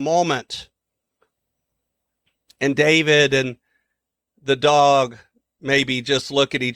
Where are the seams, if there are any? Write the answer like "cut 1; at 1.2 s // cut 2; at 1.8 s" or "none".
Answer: none